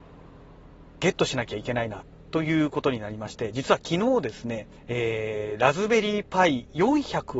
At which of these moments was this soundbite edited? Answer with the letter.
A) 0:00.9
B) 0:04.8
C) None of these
B